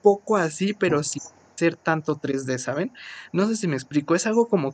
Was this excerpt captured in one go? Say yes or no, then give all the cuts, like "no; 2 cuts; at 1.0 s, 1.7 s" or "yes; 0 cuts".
yes; 0 cuts